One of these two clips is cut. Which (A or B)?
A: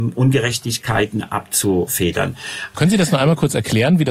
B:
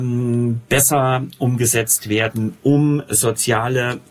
A